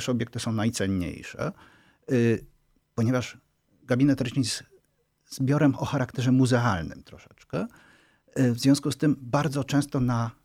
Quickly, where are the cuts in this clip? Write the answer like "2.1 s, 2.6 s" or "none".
none